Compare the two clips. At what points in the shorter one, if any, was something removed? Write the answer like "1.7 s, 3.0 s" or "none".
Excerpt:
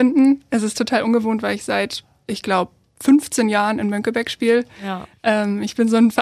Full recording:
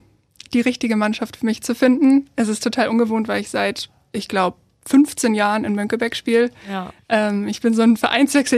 none